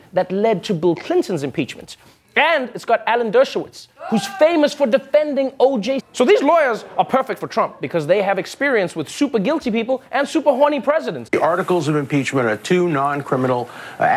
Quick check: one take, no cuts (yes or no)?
no